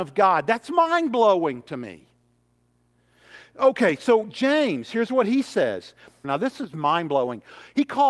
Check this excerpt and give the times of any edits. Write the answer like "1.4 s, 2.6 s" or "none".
6.2 s